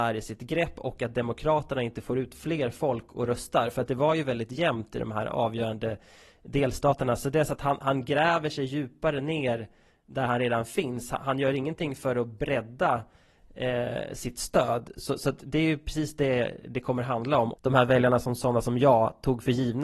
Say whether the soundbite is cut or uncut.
cut